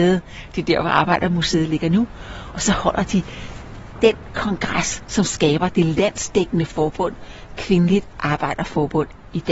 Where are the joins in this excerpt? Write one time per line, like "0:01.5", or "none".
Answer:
none